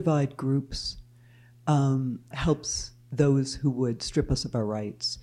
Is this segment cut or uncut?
cut